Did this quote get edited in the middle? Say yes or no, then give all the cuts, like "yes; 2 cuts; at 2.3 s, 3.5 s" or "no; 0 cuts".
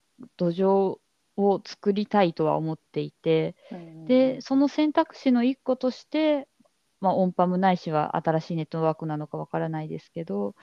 no; 0 cuts